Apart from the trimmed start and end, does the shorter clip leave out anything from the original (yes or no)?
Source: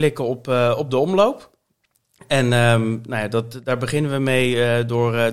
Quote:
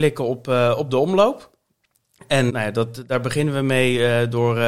yes